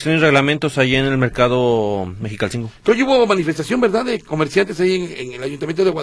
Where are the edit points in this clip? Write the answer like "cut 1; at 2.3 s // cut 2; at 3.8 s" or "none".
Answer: none